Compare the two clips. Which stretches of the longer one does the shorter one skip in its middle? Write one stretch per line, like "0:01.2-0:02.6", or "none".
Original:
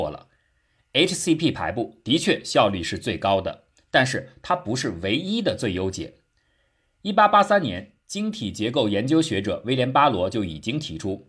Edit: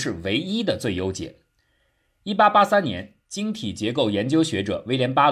none

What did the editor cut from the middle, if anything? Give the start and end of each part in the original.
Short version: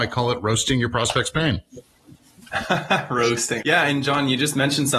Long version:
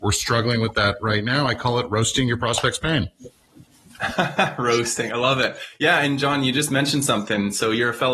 0:05.1-0:05.8

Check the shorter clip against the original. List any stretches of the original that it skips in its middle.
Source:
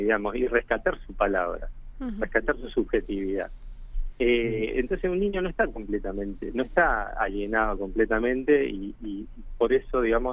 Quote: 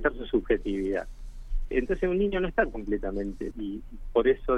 0:04.1-0:04.7
0:06.5-0:09.0

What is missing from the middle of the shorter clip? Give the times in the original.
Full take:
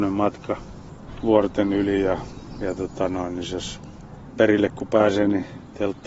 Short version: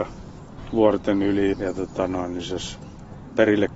0:02.0-0:02.5

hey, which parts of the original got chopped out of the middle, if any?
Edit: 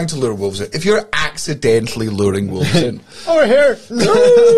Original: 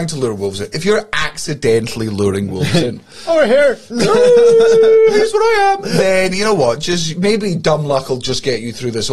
none

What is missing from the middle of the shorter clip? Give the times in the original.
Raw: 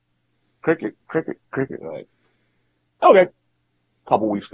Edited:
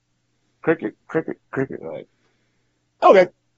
none

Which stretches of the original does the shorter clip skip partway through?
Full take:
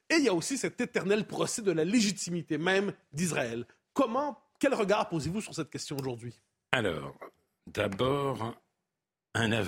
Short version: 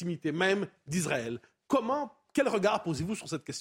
none

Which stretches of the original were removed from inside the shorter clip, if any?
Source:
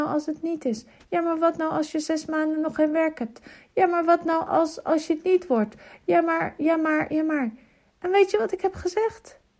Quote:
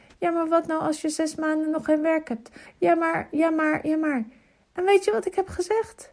0:03.6-0:05.9

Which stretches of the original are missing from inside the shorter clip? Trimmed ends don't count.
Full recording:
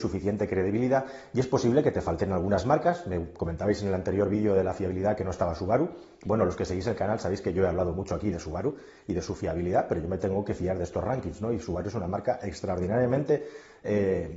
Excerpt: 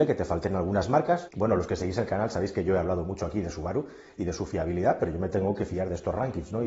0:03.0-0:06.2

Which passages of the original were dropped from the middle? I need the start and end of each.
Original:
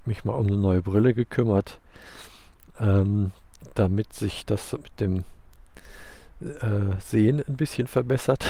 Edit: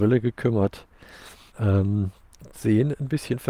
0:02.4-0:02.7
0:03.7-0:07.0

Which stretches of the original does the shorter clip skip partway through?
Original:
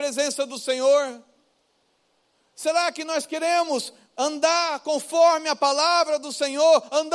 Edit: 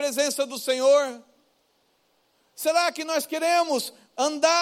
none

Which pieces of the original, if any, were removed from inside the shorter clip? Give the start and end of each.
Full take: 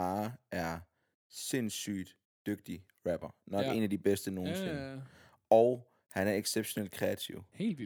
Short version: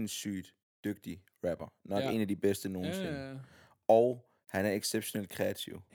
none

